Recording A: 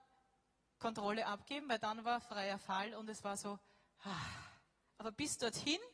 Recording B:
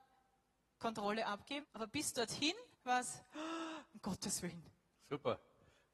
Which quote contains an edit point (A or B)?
B